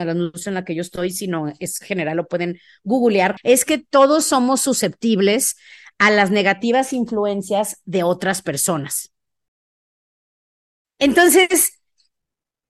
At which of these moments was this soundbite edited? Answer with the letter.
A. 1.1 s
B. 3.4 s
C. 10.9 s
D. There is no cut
B